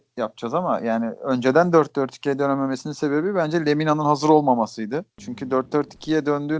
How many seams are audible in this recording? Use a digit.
1